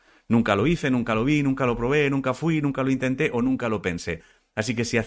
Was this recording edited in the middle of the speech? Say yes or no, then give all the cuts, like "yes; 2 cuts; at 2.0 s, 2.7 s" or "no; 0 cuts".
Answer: no; 0 cuts